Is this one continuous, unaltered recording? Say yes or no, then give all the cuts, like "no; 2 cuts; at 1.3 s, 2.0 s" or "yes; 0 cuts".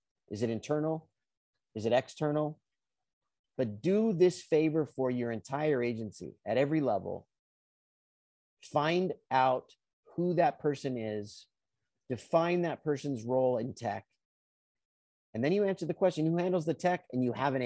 no; 1 cut; at 3.4 s